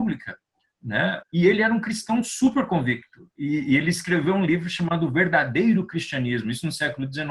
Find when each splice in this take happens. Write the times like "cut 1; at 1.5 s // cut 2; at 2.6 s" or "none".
cut 1; at 1.2 s